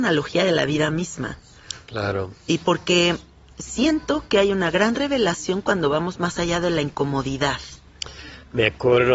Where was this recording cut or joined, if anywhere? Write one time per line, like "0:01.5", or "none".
none